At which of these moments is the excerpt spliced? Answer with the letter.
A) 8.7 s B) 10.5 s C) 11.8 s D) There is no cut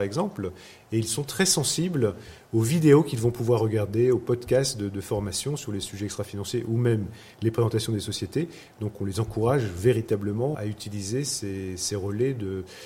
B